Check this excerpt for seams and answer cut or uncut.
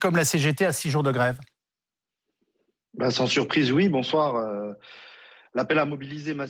uncut